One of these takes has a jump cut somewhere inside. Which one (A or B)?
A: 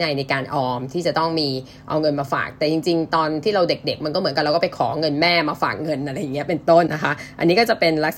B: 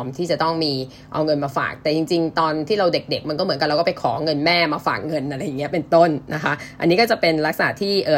A